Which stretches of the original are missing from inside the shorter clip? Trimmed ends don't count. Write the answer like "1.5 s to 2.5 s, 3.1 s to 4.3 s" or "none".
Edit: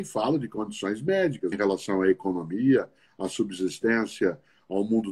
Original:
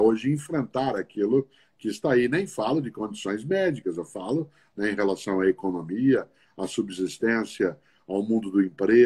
3.9 s to 4.9 s